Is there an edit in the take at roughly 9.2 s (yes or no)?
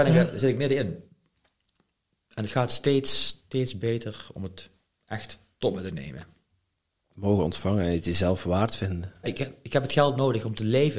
yes